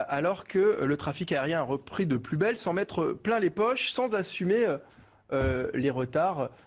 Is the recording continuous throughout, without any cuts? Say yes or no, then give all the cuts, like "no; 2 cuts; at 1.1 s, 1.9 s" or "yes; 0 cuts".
yes; 0 cuts